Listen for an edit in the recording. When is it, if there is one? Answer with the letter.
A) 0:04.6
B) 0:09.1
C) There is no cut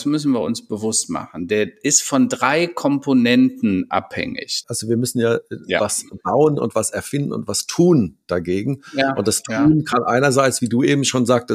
A